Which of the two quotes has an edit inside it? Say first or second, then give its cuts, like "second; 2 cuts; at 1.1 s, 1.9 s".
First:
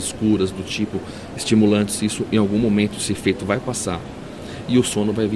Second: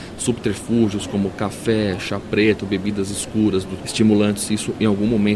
second; 1 cut; at 3.8 s